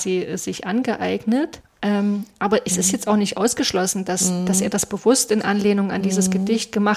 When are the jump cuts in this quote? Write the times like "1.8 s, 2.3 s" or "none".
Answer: none